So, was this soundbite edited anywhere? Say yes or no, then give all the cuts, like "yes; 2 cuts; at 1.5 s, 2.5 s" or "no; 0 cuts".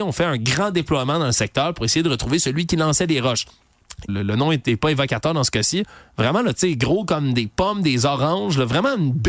yes; 1 cut; at 4.1 s